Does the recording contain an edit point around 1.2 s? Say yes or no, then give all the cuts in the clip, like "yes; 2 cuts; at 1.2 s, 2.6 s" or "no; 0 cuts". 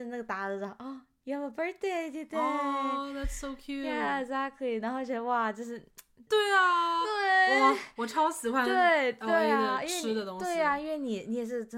no; 1 cut; at 6.3 s